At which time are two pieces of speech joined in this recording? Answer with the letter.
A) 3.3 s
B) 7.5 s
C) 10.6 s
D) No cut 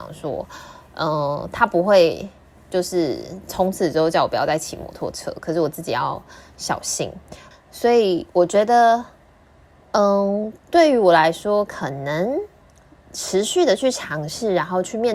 B